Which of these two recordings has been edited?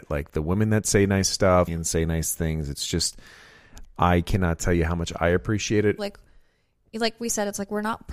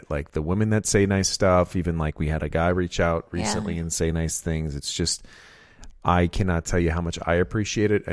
first; 2 cuts; at 1.7 s, 6.0 s

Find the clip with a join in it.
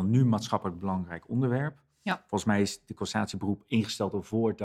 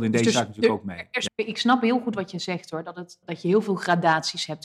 second; 2 cuts; at 1.3 s, 3.2 s

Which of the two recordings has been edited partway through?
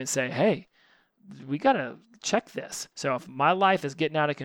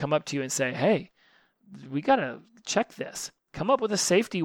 first; 1 cut; at 2.9 s

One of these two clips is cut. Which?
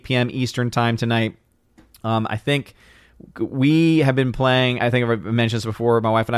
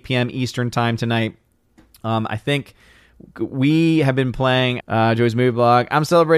second; 1 cut; at 4.8 s

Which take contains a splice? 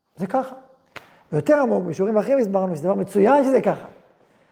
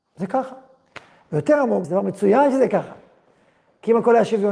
second; 1 cut; at 1.8 s

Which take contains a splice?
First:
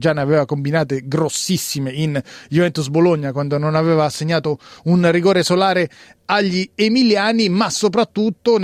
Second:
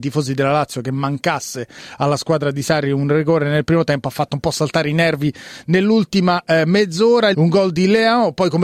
second; 1 cut; at 7.3 s

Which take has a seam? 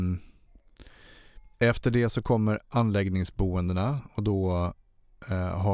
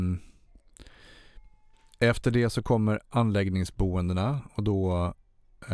first; 1 cut; at 1.5 s

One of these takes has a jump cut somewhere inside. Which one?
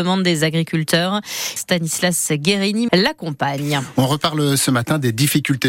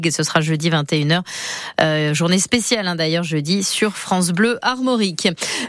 first; 2 cuts; at 1.6 s, 2.9 s

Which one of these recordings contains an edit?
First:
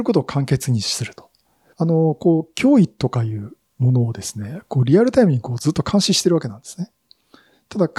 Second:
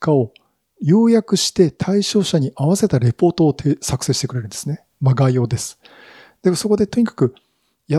first; 1 cut; at 1.7 s

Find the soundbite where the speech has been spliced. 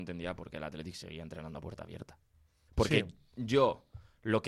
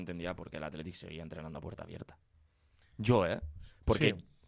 first; 1 cut; at 2.7 s

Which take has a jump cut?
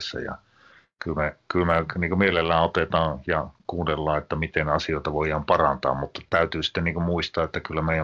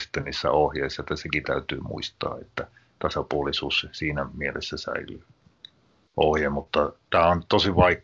second; 1 cut; at 6.1 s

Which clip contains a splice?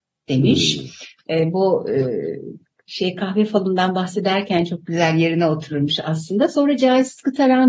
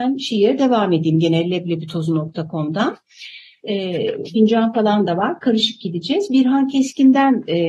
second; 1 cut; at 4.3 s

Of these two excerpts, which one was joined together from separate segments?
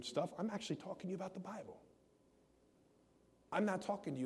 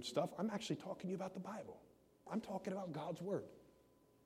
second; 1 cut; at 2.3 s

